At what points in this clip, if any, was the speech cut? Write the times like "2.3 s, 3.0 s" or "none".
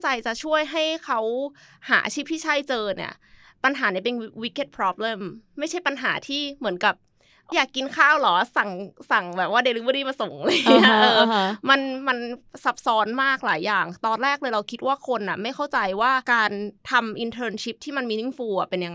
7.5 s, 16.2 s